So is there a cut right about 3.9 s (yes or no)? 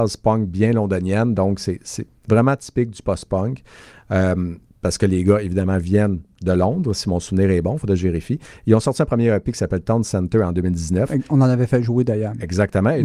no